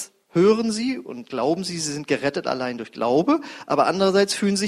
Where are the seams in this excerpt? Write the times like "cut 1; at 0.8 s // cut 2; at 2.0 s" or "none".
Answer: none